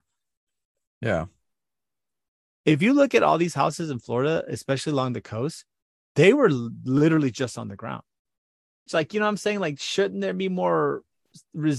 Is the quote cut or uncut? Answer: cut